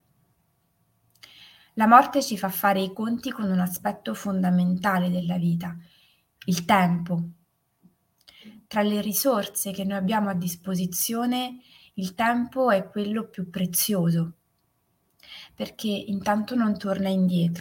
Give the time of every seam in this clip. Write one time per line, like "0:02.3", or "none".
none